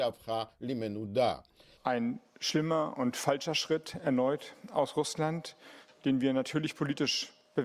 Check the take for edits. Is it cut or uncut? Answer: cut